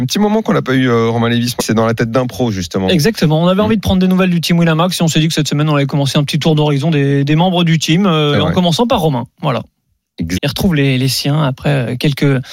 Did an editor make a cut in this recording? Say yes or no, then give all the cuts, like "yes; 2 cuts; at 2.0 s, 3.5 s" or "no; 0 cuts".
yes; 2 cuts; at 1.6 s, 10.4 s